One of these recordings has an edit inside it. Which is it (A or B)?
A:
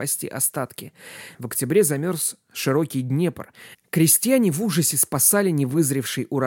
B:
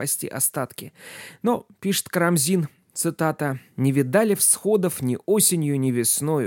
A